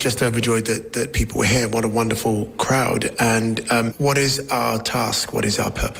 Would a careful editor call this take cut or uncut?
cut